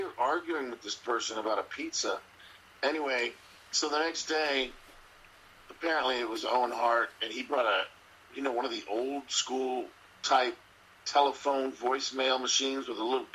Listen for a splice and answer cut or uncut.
uncut